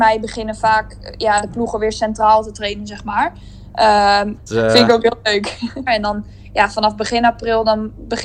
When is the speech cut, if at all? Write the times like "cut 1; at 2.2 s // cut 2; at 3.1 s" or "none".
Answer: cut 1; at 4.4 s // cut 2; at 5.9 s